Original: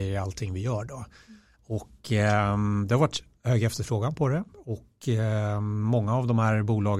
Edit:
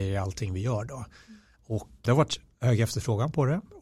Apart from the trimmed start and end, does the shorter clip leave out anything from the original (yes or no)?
yes